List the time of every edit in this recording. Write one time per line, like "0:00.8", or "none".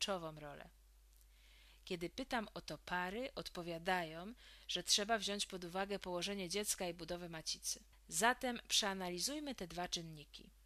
0:07.9